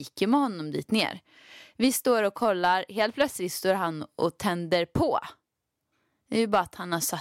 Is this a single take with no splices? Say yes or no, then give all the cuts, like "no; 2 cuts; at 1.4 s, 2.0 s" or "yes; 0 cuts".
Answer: yes; 0 cuts